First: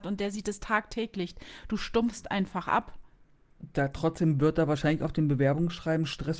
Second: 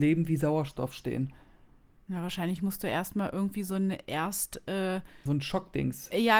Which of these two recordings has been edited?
second; 1 cut; at 5.3 s

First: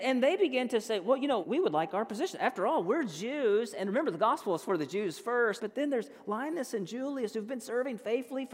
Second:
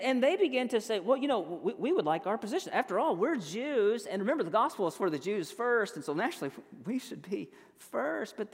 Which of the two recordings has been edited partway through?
first; 2 cuts; at 1.4 s, 5.6 s

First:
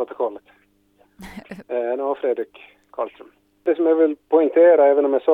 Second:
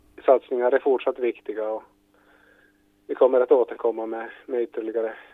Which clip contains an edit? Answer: first; 1 cut; at 1.6 s

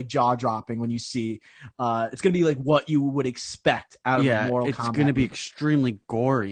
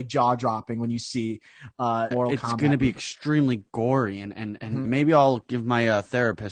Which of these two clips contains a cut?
second; 2 cuts; at 2.1 s, 4.8 s

